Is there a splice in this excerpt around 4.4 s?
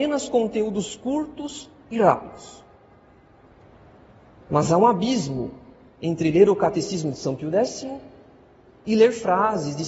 yes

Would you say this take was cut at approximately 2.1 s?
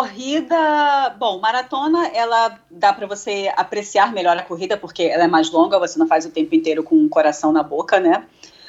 no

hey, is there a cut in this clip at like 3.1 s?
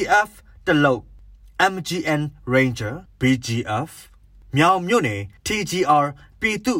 yes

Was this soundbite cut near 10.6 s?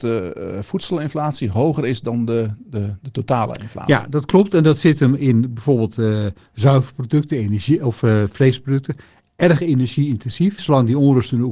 yes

